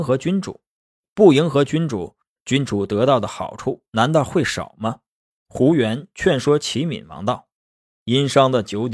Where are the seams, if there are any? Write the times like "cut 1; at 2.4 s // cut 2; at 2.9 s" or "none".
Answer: cut 1; at 5.3 s // cut 2; at 7.6 s